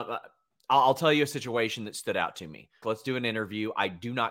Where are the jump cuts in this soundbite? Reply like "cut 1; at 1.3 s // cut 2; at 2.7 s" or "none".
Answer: cut 1; at 2.8 s